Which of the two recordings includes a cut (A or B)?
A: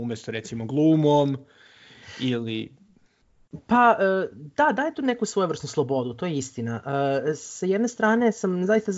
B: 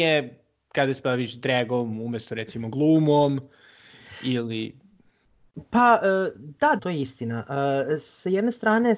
B